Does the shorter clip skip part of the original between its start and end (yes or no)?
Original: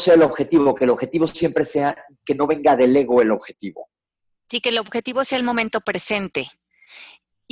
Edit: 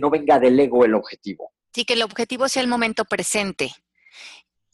yes